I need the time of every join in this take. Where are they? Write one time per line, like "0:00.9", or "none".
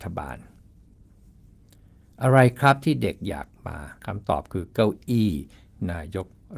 0:04.0